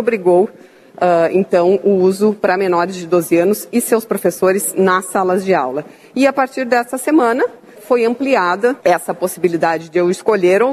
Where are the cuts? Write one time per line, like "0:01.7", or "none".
0:07.8
0:08.8